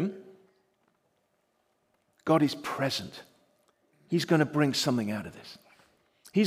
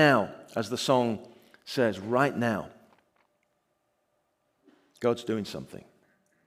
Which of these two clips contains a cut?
first; 1 cut; at 2.1 s

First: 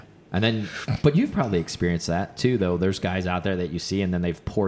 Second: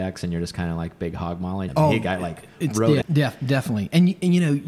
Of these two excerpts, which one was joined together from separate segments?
second; 2 cuts; at 1.7 s, 3.0 s

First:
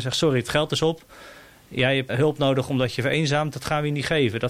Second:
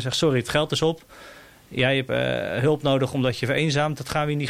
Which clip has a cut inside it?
first; 1 cut; at 2.1 s

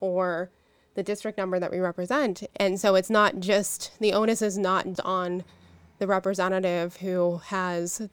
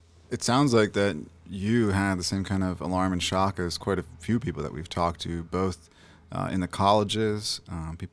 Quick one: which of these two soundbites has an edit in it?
first; 2 cuts; at 2.5 s, 4.9 s

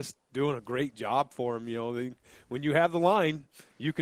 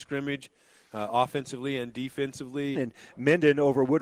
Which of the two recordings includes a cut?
second; 1 cut; at 2.7 s

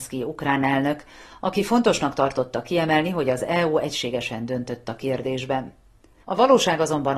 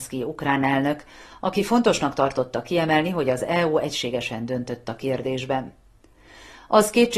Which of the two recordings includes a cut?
first; 1 cut; at 6.2 s

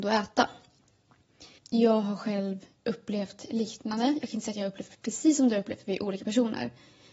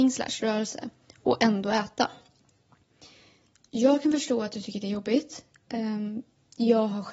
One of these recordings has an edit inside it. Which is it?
first; 1 cut; at 1.6 s

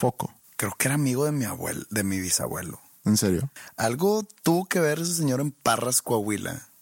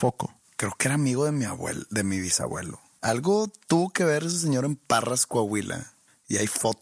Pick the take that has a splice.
second; 1 cut; at 3.0 s

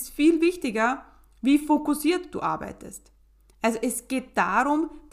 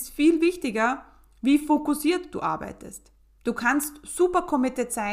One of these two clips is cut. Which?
second; 1 cut; at 3.4 s

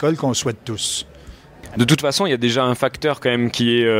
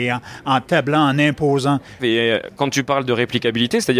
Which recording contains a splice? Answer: second; 1 cut; at 2.0 s

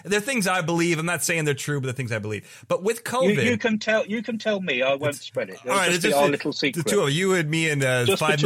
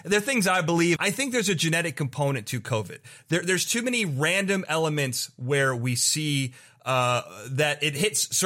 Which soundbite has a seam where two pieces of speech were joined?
second; 1 cut; at 1.0 s

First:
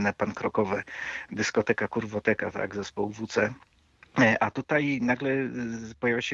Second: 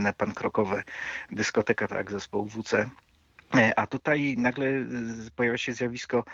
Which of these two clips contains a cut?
second; 1 cut; at 1.9 s

